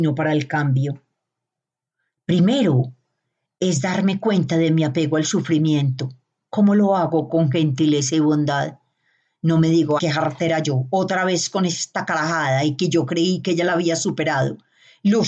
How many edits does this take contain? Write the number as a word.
one